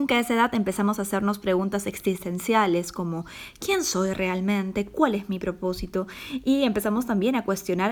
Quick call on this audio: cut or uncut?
uncut